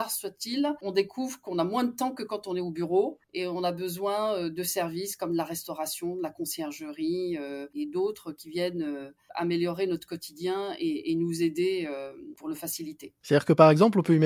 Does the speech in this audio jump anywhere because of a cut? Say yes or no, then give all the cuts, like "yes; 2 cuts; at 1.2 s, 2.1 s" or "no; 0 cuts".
no; 0 cuts